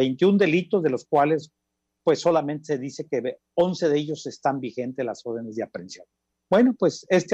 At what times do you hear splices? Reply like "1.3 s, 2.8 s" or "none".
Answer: none